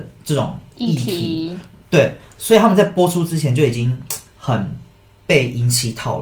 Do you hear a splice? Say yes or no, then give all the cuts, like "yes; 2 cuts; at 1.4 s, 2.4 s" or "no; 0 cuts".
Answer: no; 0 cuts